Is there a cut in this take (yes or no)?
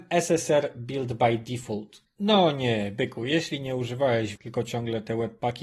yes